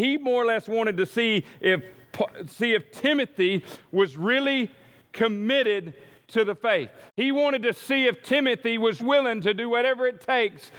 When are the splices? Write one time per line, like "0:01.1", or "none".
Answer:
0:07.1
0:09.0

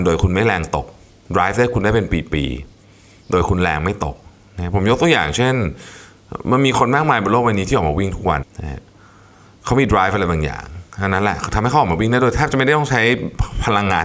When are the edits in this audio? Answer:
0:08.4

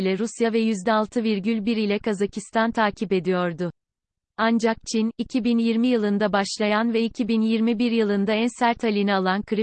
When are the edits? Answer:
none

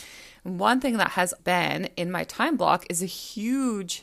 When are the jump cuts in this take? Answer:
0:01.4

